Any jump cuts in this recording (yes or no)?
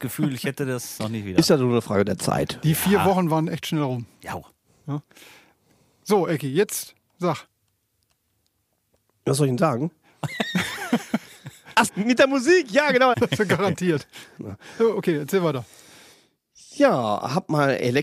yes